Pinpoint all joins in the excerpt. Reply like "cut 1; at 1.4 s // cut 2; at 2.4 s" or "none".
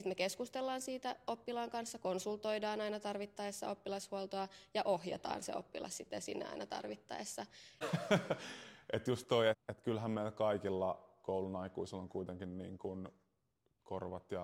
cut 1; at 7.8 s // cut 2; at 9.5 s